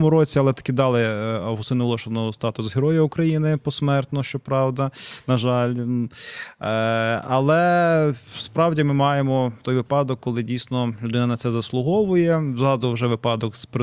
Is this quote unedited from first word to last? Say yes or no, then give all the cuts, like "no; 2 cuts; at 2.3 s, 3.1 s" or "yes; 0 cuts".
yes; 0 cuts